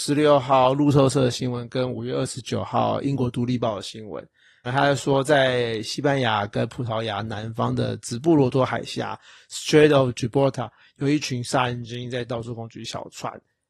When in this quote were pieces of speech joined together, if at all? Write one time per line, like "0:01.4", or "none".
0:04.7